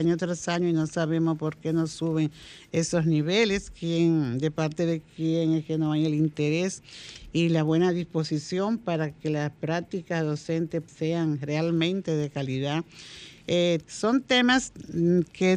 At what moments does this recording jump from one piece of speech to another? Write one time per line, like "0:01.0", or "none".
0:10.9
0:13.8